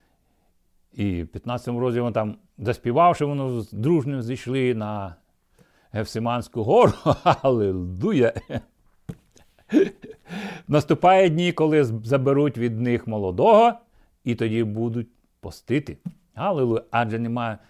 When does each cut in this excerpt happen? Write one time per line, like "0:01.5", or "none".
none